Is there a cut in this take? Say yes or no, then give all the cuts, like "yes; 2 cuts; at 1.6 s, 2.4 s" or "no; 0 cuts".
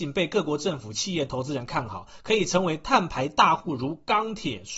no; 0 cuts